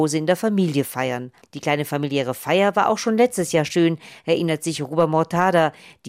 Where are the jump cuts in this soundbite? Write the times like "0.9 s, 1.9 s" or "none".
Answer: 1.4 s